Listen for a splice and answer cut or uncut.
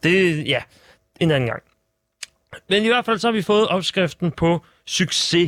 uncut